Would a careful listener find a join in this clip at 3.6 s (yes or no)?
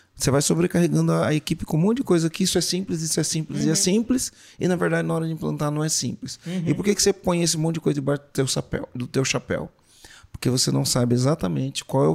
no